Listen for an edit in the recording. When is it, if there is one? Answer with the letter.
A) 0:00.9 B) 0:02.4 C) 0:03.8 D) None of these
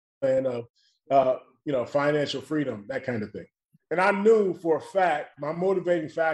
C